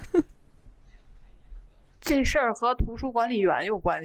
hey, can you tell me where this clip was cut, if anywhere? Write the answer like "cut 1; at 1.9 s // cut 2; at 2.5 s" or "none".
none